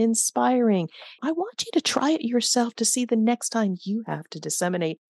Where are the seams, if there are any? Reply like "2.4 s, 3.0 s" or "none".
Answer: 1.2 s